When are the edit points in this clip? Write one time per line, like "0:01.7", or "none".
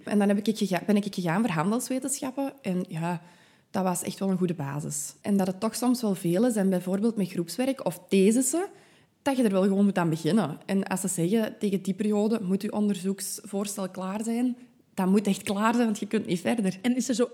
0:05.2

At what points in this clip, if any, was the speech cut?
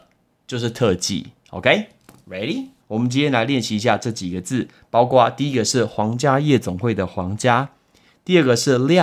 0:02.8

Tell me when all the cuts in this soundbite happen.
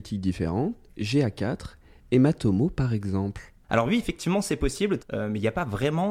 0:05.0

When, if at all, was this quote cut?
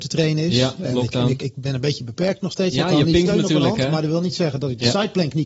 0:01.4

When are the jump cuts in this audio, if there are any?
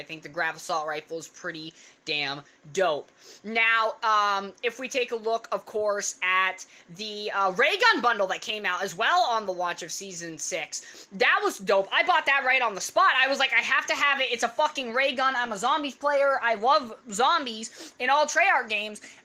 none

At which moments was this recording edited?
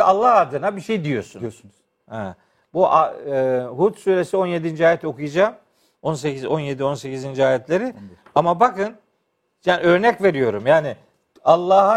none

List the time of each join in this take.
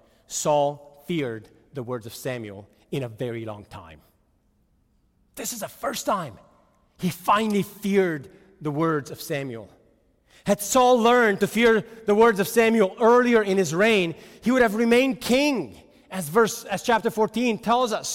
none

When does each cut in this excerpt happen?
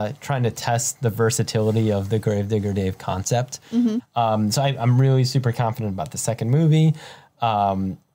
0:04.0

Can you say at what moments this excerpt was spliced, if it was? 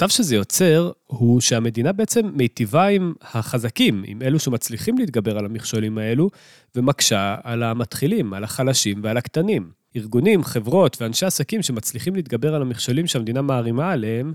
none

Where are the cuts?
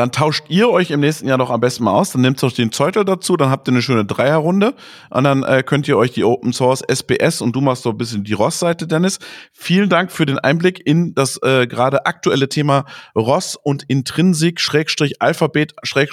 none

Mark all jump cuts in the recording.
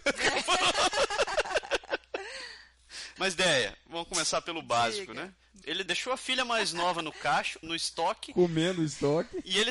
0:03.2
0:05.6
0:07.6

